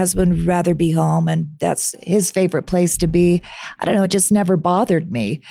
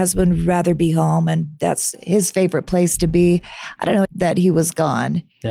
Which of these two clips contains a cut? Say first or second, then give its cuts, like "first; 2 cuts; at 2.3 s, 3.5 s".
second; 1 cut; at 4.0 s